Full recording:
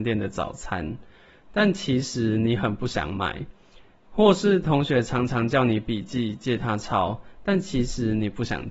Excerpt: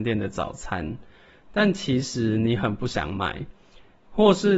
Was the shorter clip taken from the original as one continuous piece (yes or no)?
yes